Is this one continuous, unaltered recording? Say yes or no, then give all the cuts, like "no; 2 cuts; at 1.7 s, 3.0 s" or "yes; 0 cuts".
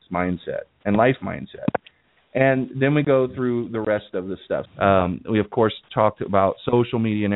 no; 1 cut; at 4.7 s